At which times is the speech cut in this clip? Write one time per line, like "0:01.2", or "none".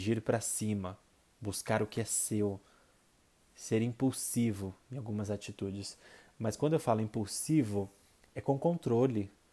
none

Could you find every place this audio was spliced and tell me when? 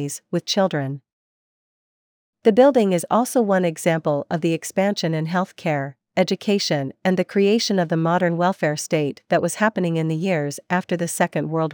none

